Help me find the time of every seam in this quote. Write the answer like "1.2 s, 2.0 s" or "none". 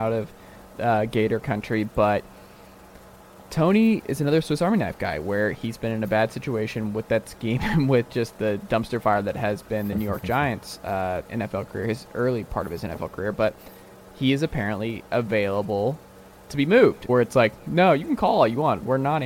11.2 s, 17.1 s